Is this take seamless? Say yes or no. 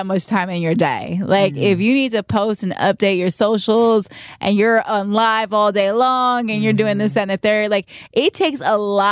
yes